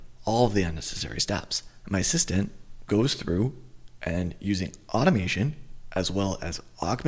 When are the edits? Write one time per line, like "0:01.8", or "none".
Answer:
0:01.8
0:02.9